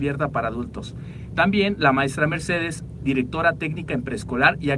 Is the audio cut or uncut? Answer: uncut